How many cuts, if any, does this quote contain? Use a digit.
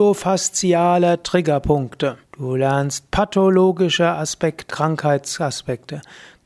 2